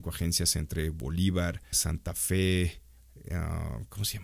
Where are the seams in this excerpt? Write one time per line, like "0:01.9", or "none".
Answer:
0:01.7
0:03.0